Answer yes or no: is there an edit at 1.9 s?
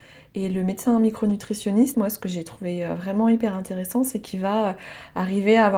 yes